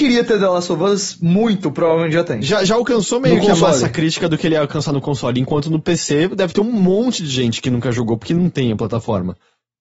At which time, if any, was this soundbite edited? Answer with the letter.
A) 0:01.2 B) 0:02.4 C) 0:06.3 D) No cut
D